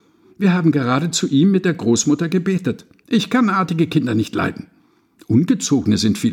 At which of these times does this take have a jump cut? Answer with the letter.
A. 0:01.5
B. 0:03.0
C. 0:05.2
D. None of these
B